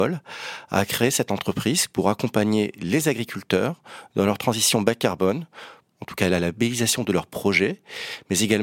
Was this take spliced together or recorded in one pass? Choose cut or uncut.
cut